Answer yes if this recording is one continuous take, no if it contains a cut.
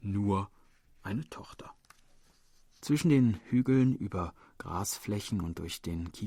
no